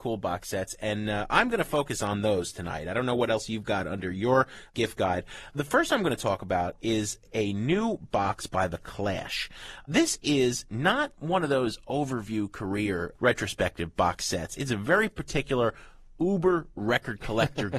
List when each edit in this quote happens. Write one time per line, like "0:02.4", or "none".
none